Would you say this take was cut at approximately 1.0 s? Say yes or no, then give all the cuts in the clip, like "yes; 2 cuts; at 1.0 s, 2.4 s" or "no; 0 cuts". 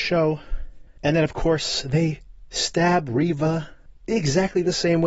yes; 1 cut; at 1.0 s